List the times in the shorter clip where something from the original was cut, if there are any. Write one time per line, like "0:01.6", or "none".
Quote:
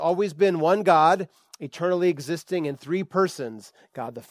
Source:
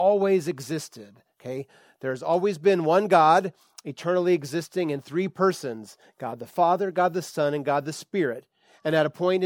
none